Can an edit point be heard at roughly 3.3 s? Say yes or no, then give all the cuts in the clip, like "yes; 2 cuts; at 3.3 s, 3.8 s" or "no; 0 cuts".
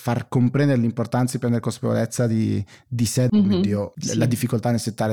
yes; 1 cut; at 3.3 s